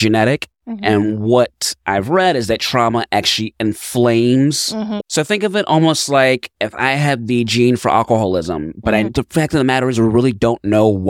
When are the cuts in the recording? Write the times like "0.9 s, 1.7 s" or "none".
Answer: 5.0 s, 9.1 s

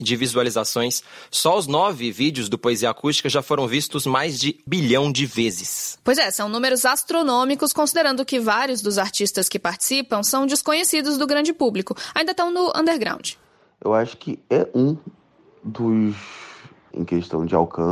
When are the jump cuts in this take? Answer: 4.7 s, 16.9 s

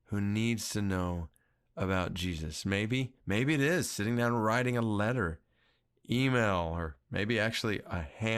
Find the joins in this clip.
none

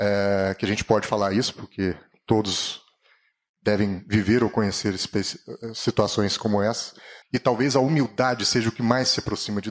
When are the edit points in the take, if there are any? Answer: 7.2 s

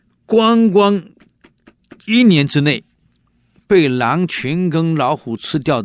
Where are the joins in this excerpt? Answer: none

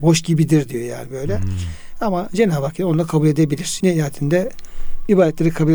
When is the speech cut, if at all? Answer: 3.8 s

